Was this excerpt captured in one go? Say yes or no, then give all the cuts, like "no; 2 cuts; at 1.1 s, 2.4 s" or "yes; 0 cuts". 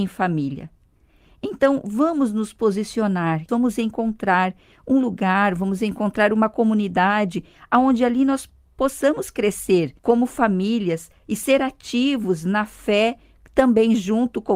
no; 2 cuts; at 3.5 s, 10.0 s